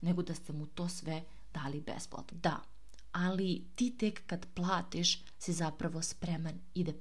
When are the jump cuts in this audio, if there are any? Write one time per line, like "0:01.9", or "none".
0:02.3